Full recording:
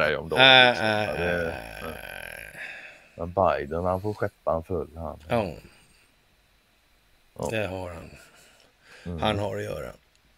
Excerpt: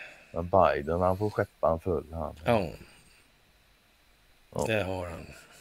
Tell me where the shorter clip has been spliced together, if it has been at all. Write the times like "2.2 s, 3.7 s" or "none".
none